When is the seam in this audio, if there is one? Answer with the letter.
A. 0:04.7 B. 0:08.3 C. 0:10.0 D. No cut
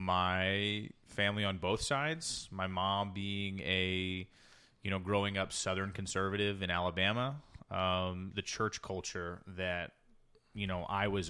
B